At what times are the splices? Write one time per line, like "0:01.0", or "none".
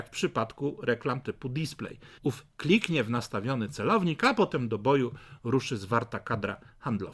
0:02.2